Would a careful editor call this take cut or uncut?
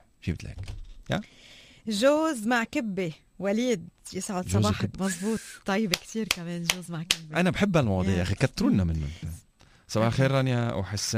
cut